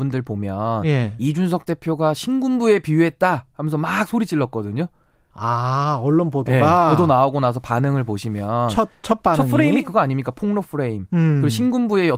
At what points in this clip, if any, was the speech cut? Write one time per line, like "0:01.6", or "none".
none

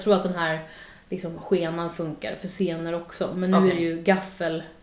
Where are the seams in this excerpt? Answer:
none

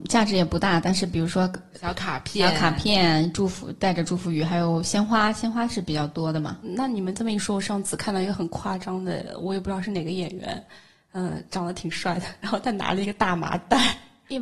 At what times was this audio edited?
none

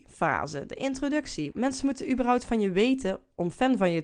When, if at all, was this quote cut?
0:01.5

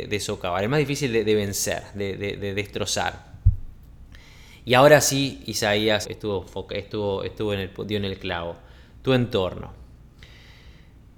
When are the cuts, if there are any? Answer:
0:06.0

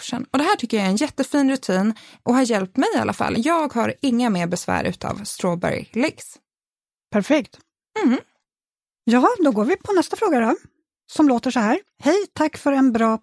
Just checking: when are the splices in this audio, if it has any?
none

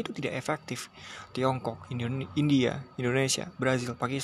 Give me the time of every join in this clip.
none

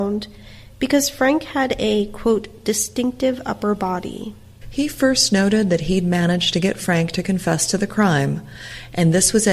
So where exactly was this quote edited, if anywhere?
0:04.6

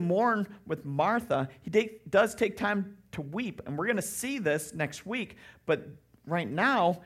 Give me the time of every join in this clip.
none

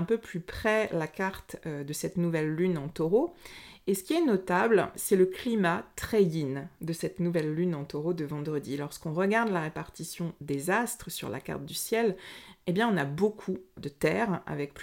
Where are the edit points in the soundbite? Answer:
0:04.9
0:13.8

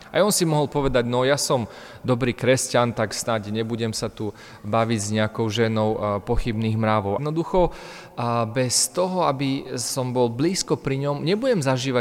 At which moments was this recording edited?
0:07.2

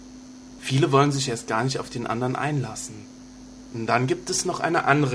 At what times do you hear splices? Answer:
0:03.7

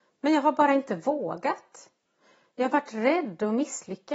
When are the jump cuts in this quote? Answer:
none

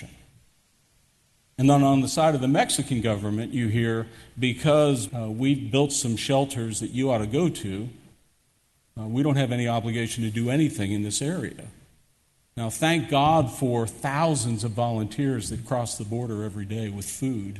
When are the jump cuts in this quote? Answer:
0:05.1

